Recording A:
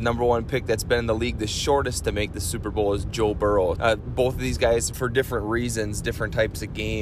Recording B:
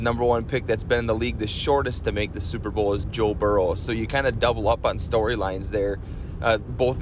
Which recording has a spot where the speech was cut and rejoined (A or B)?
A